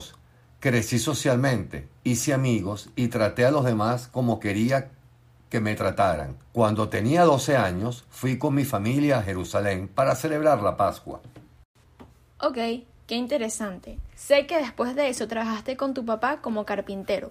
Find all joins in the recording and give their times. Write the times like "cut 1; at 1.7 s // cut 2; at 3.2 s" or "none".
cut 1; at 6.5 s